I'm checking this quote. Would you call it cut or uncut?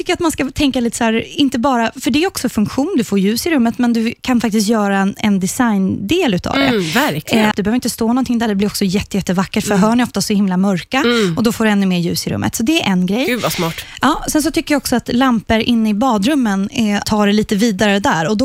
cut